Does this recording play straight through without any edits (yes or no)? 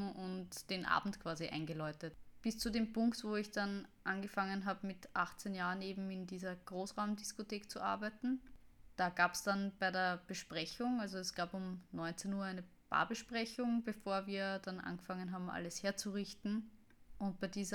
no